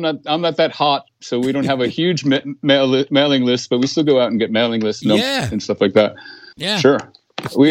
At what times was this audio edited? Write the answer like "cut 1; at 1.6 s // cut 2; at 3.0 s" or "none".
cut 1; at 6.5 s

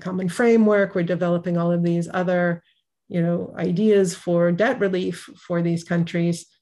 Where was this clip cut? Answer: none

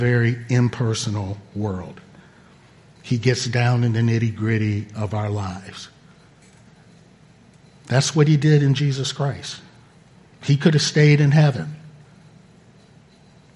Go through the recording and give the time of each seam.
cut 1; at 3.0 s

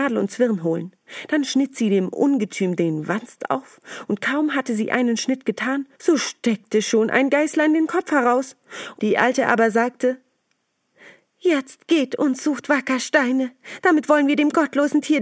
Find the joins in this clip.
cut 1; at 5.9 s // cut 2; at 9.0 s

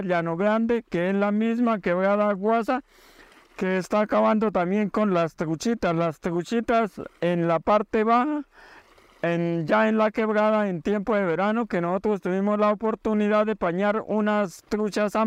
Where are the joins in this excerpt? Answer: none

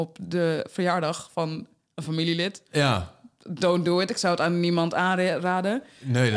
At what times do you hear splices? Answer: none

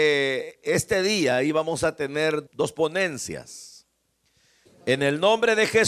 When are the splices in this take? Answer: cut 1; at 2.5 s // cut 2; at 4.7 s

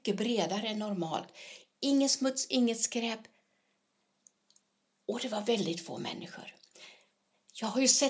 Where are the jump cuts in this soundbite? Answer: none

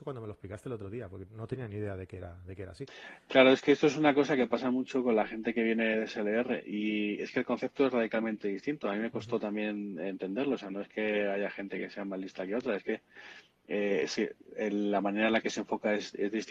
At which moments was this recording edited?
none

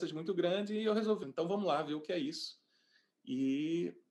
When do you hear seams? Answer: cut 1; at 1.2 s

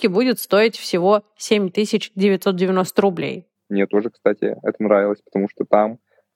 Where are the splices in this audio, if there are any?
cut 1; at 3.5 s

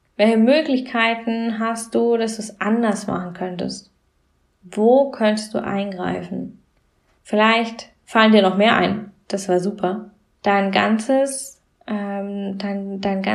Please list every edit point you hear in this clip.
cut 1; at 7.2 s // cut 2; at 10.4 s

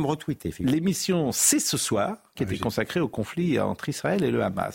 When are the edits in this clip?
cut 1; at 2.3 s

